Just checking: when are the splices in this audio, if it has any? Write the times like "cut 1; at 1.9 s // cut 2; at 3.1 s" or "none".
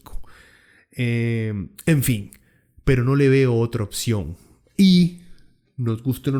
none